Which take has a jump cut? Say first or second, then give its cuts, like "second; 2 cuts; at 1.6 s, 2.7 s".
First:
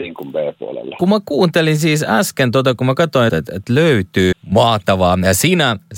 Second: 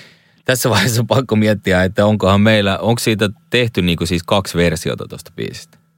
first; 2 cuts; at 3.3 s, 4.3 s